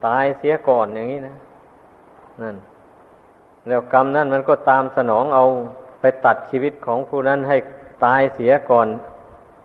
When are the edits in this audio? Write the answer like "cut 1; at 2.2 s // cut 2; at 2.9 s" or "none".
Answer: cut 1; at 6.0 s // cut 2; at 7.9 s